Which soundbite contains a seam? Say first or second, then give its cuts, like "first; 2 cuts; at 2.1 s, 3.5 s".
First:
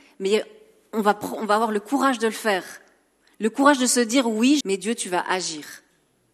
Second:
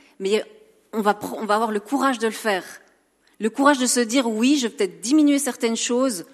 first; 1 cut; at 4.6 s